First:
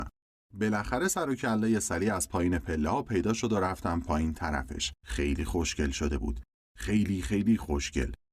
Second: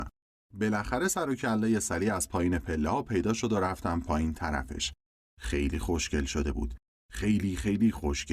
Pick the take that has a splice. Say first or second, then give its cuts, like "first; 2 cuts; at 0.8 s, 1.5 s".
first; 1 cut; at 5.0 s